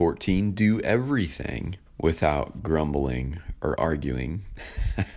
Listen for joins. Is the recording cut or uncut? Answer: cut